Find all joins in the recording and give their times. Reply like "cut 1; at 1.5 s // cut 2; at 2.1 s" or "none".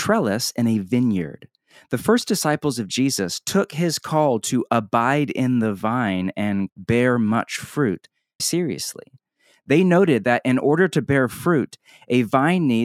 cut 1; at 6.7 s // cut 2; at 8.4 s